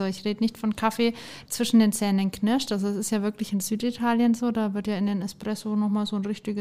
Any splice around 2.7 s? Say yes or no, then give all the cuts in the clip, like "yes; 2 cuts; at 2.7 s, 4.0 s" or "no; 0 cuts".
no; 1 cut; at 1.4 s